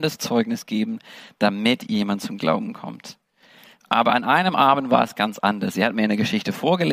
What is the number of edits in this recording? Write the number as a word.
one